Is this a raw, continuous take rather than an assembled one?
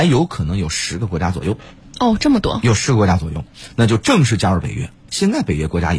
no; 1 cut; at 5.1 s

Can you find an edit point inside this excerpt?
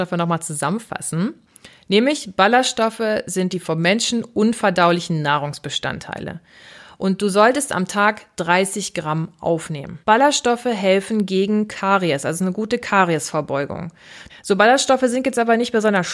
yes; 2 cuts; at 10.0 s, 14.3 s

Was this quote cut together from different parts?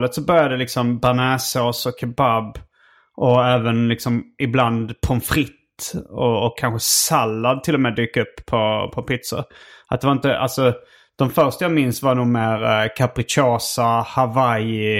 no; 0 cuts

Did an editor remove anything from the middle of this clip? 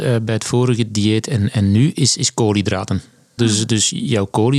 yes; 1 cut; at 3.4 s

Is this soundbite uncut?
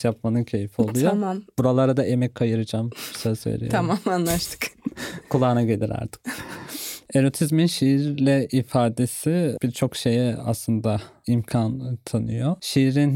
yes; 0 cuts

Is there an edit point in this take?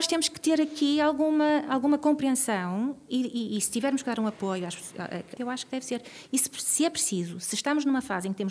yes; 1 cut; at 5.4 s

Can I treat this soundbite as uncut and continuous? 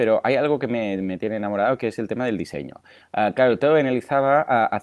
yes; 0 cuts

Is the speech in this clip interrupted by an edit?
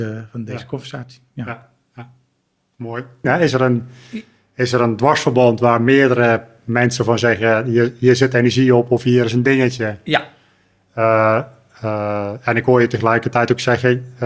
yes; 1 cut; at 3.2 s

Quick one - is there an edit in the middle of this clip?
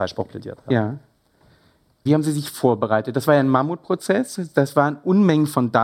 yes; 1 cut; at 2.1 s

